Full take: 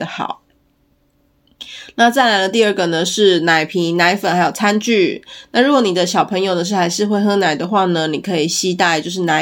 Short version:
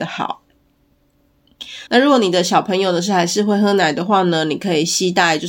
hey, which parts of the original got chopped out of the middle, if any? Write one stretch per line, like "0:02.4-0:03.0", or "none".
0:01.9-0:05.5

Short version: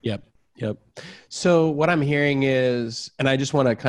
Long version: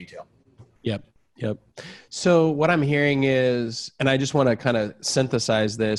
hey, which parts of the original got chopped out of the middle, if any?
none

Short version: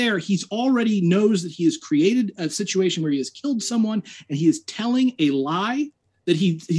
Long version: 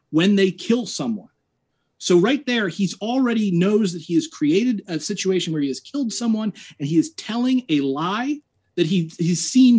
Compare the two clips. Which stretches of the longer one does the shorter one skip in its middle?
none

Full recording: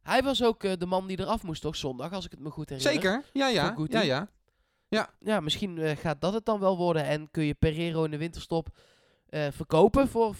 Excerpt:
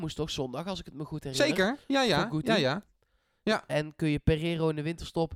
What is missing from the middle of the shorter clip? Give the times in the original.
0:05.1-0:07.0

